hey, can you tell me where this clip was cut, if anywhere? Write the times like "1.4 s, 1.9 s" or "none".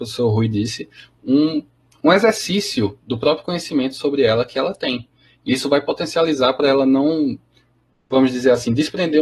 2.0 s